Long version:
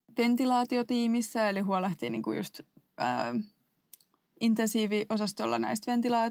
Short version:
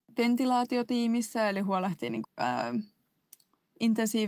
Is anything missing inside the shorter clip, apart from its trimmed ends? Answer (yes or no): yes